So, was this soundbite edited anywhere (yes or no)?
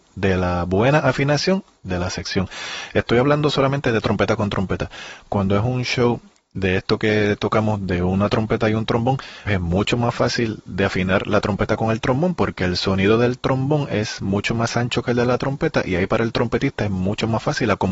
yes